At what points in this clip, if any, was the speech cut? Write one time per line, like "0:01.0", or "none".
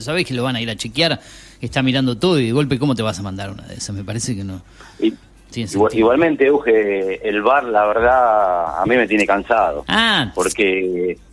none